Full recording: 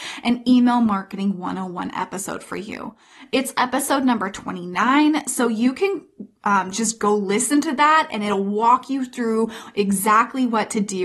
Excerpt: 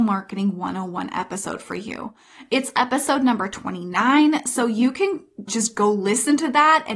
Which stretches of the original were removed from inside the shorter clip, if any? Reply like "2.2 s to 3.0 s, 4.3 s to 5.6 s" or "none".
6.3 s to 6.7 s

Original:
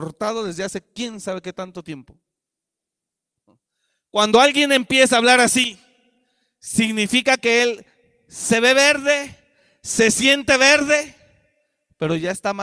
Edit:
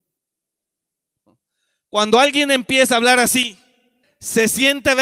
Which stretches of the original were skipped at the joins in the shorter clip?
6.2 s to 9.7 s

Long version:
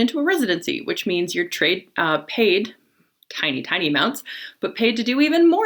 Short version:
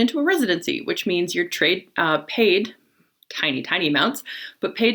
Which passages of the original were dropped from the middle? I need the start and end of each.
none

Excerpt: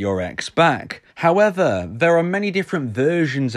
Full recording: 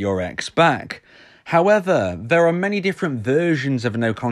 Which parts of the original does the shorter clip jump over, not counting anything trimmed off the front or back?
1.1 s to 1.4 s

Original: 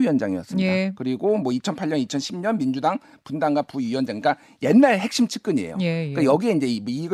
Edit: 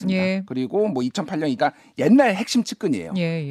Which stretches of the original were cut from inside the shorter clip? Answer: 2.1 s to 4.2 s

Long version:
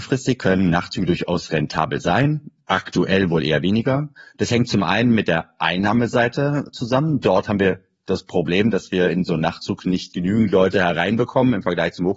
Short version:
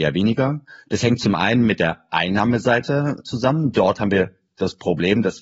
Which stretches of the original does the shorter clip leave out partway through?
none

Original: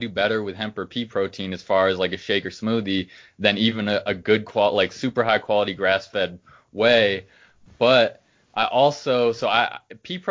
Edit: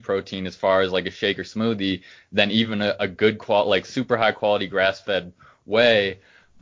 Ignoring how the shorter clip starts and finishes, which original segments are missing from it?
none

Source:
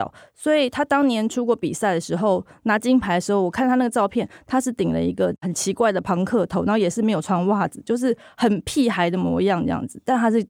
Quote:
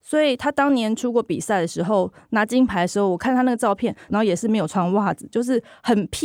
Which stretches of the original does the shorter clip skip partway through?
4.4 s to 6.6 s

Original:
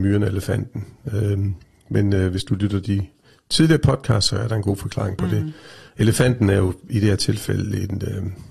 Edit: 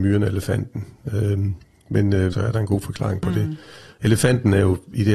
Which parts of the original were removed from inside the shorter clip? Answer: 2.3 s to 4.3 s

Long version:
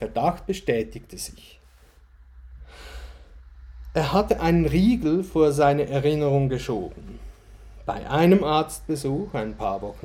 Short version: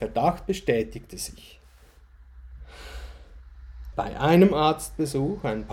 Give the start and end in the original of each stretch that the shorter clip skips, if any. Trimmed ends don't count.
3.9 s to 7.8 s

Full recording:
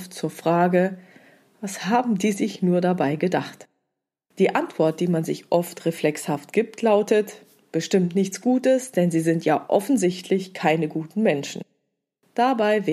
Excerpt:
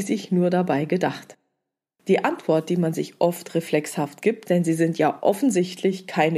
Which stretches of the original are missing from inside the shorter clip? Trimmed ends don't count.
6.8 s to 8.9 s

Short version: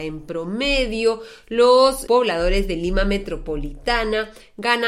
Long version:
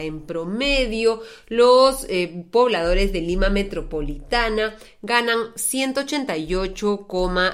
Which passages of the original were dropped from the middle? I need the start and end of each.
2.1 s to 2.5 s

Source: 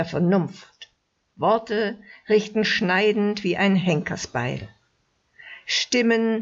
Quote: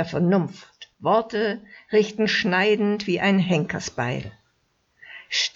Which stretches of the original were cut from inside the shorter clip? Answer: 0.9 s to 1.3 s

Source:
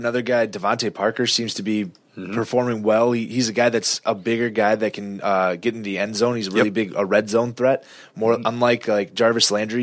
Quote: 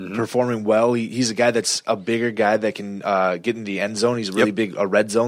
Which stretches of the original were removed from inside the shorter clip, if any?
none

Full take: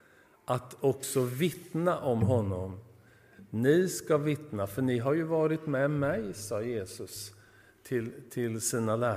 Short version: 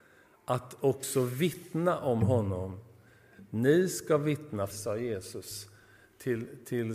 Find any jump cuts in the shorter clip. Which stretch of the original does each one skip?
4.7 s to 6.3 s

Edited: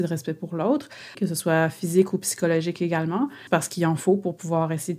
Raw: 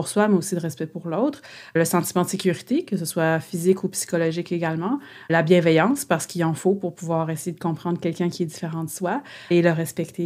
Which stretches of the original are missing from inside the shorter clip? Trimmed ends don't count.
1.7 s to 2.9 s, 5.2 s to 6.1 s

